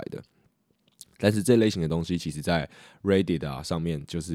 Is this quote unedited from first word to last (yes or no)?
yes